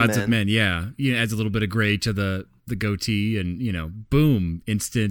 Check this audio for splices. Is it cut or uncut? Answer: uncut